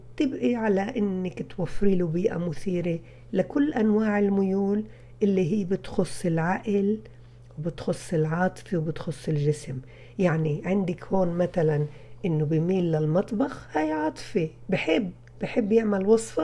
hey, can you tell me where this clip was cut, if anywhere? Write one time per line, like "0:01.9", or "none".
none